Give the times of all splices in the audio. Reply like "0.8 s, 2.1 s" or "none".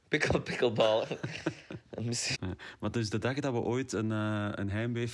2.3 s